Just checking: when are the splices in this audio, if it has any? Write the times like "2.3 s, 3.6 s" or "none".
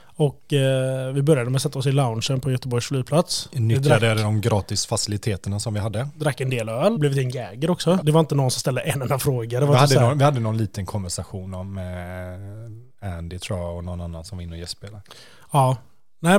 7.0 s, 8.0 s

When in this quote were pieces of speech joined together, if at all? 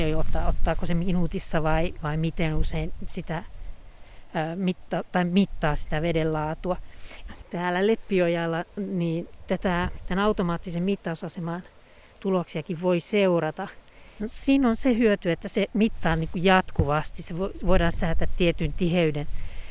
7.3 s, 14.2 s

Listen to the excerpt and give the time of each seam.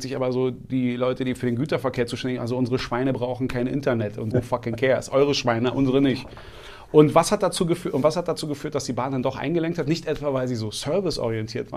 4.3 s

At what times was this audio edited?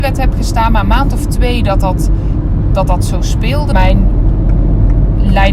3.7 s

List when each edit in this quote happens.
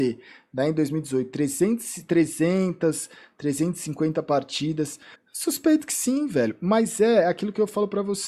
5.1 s

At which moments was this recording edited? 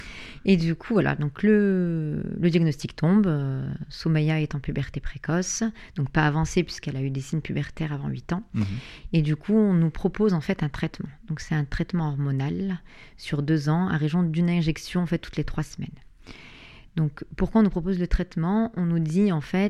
none

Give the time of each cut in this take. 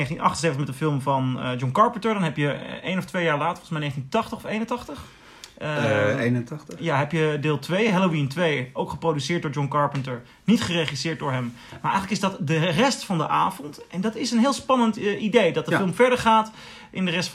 none

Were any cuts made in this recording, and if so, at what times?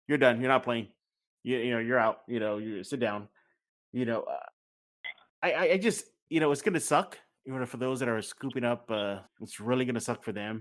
9.3 s

